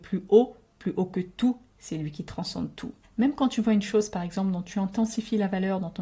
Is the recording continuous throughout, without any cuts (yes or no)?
no